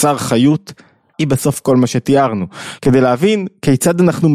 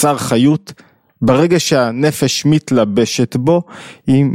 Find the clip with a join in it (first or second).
first